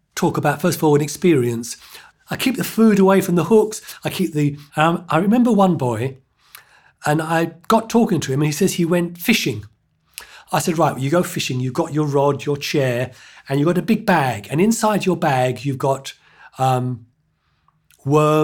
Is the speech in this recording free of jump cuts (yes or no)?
no